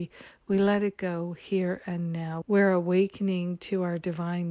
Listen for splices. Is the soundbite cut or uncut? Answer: cut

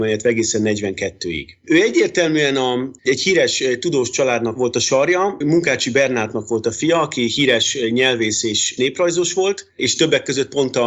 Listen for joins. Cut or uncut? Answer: cut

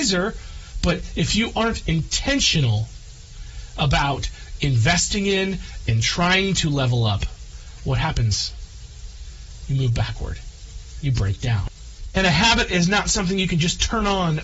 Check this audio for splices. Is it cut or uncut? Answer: cut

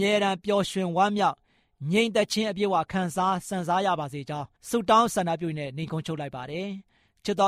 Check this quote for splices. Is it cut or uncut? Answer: cut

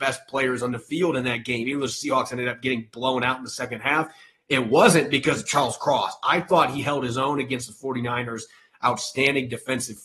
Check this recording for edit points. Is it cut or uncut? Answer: uncut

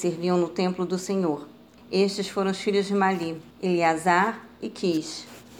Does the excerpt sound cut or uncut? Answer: cut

